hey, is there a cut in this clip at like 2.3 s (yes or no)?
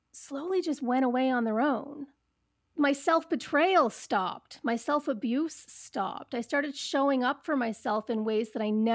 no